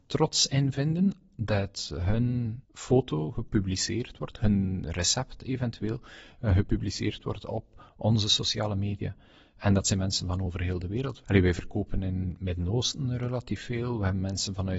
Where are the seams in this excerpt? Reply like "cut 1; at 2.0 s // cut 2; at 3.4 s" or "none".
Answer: cut 1; at 2.6 s